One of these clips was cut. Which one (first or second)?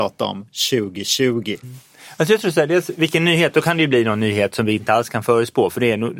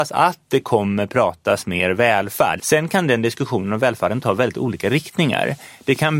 second